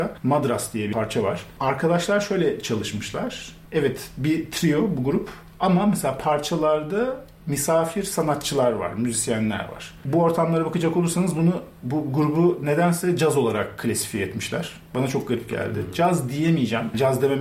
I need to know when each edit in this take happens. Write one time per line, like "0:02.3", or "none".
0:10.1